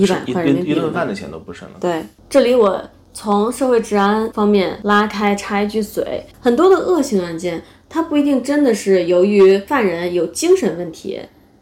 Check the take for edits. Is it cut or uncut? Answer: cut